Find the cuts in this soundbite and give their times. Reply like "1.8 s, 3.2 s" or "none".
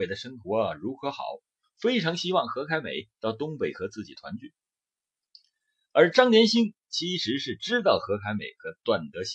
none